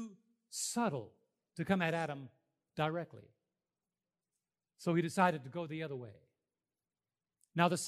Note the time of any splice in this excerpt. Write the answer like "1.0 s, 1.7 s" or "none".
none